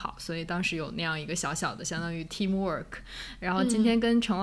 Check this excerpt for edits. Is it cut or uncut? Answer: uncut